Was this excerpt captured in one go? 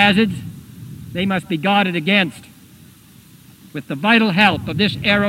yes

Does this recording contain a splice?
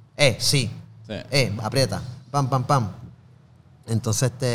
yes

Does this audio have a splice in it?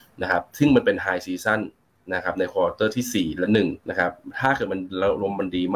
yes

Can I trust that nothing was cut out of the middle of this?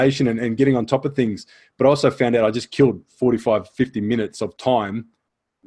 yes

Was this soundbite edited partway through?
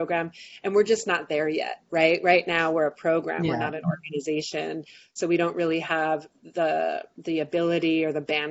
no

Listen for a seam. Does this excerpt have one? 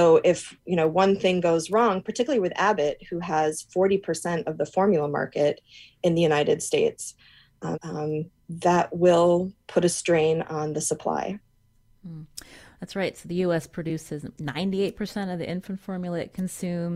yes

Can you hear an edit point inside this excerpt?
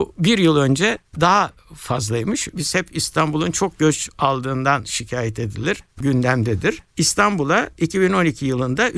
yes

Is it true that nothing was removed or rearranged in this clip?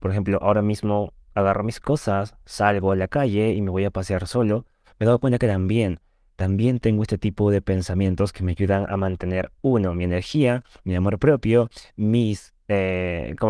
yes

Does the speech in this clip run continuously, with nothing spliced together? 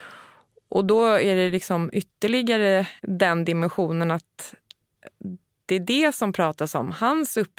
no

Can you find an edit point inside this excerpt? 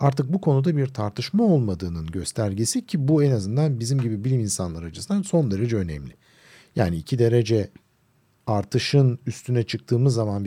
no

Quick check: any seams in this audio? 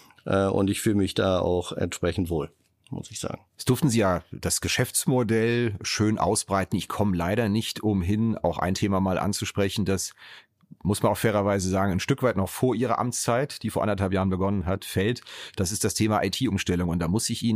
no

